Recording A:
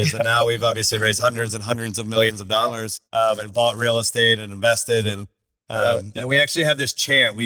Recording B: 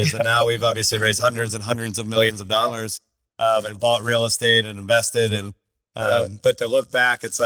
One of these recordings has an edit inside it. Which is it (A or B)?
A